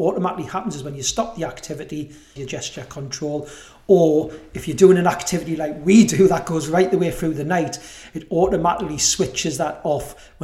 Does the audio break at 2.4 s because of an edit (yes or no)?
yes